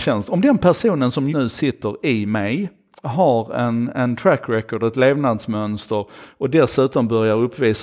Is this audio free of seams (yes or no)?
no